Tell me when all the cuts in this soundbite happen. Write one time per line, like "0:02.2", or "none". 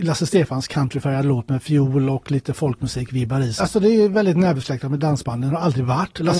0:03.6

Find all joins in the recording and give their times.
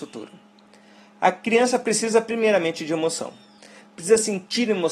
none

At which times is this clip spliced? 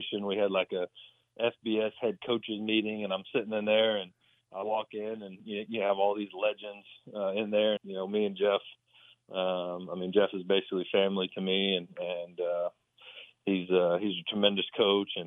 0:07.8

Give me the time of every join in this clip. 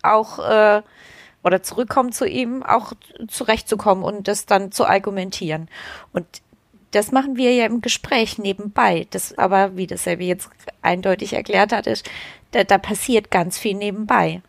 0:09.4

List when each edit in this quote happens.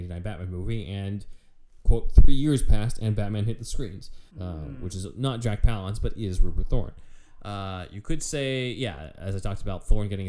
0:04.3

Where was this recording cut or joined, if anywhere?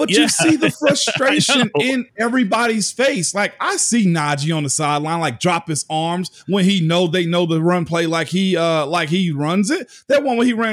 none

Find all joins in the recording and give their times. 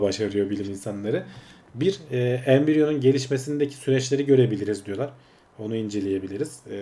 none

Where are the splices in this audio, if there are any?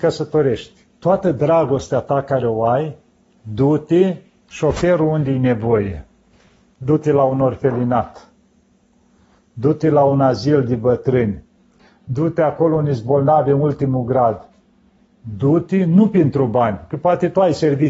none

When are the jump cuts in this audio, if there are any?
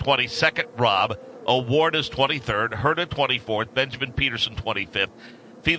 none

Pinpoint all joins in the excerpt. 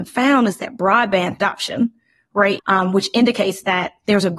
0:02.6

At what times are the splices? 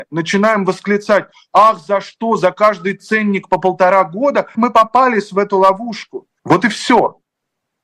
0:04.5
0:06.4

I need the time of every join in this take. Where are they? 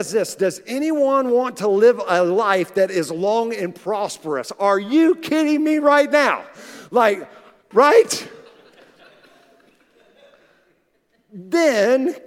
0:07.7

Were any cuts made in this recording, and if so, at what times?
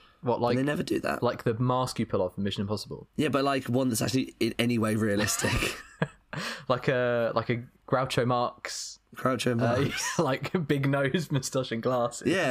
none

